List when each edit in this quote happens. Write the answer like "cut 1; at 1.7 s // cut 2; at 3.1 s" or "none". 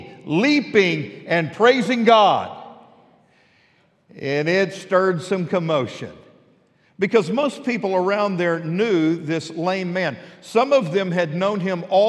none